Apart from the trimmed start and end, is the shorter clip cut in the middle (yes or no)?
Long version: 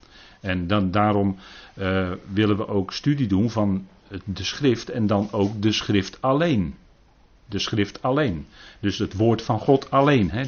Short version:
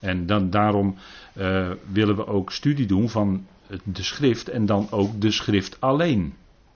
no